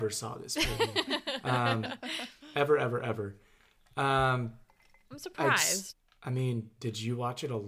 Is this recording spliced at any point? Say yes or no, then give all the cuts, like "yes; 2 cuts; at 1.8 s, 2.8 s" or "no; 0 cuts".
yes; 1 cut; at 6.8 s